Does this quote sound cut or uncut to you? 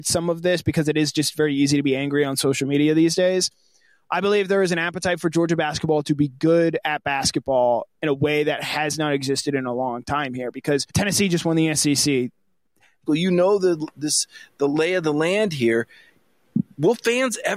cut